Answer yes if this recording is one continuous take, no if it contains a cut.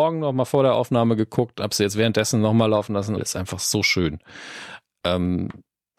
no